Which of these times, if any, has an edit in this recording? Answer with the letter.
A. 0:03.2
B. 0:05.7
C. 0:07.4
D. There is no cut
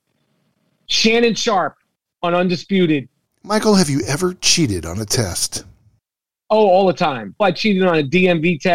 C